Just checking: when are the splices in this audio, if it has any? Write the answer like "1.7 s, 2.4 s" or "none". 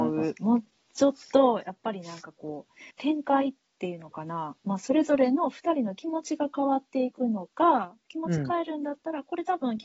2.9 s